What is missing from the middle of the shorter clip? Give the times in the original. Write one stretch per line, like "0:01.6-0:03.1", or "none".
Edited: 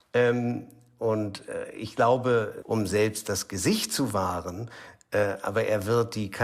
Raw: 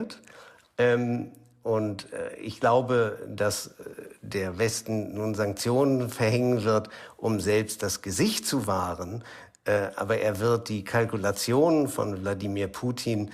0:03.3-0:07.2